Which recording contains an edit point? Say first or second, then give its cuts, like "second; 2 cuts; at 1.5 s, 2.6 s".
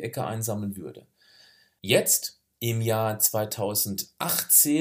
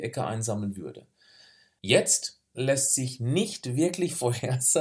second; 1 cut; at 2.5 s